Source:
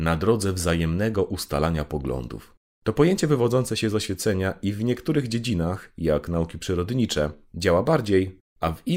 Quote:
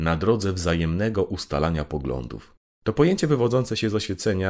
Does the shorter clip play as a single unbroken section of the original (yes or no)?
yes